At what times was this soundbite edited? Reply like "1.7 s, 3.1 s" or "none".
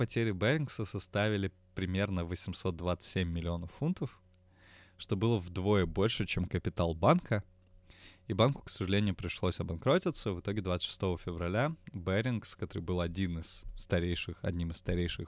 none